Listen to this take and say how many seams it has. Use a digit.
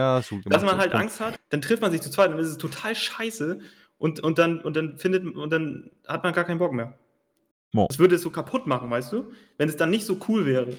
1